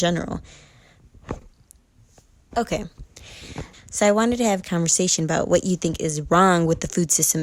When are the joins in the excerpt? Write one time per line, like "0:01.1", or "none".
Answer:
0:02.5
0:03.7